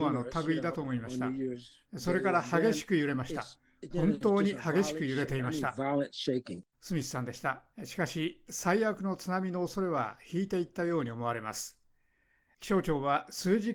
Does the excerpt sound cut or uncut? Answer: cut